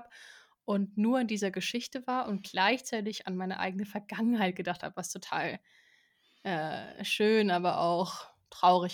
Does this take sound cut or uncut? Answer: uncut